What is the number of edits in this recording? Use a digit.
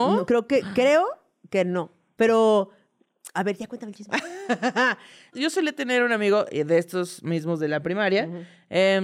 1